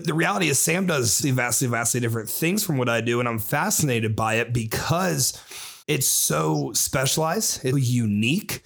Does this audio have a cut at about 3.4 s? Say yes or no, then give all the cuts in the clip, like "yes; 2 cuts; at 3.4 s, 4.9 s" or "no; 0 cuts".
no; 3 cuts; at 1.2 s, 5.8 s, 7.7 s